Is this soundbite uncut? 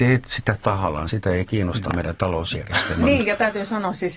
yes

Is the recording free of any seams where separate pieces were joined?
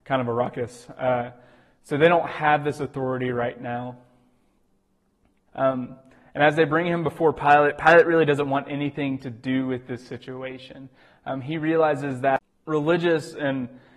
no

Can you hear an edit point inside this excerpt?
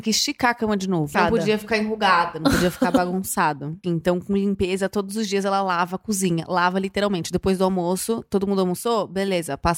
yes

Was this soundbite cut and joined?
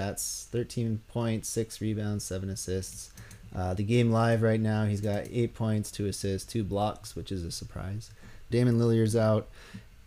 yes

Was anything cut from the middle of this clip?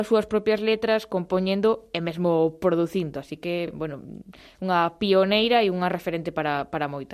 no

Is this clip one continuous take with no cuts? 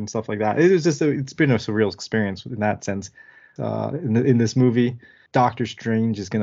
no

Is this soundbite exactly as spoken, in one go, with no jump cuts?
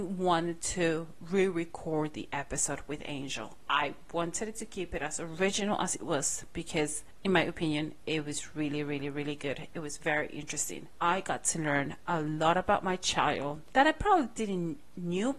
yes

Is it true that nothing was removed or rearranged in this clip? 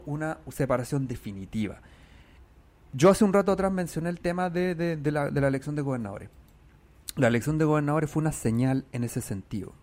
yes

